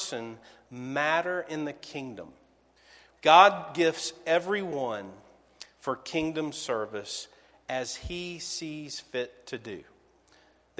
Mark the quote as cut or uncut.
cut